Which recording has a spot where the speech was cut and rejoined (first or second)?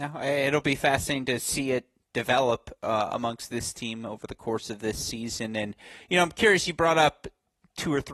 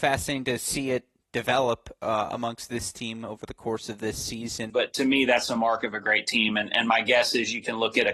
second